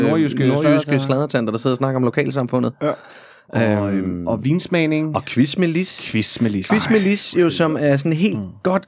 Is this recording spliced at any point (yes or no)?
no